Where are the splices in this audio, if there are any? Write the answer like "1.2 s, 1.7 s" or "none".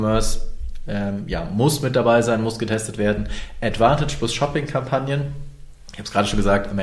none